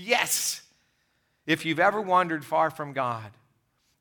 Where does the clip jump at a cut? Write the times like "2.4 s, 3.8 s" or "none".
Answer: none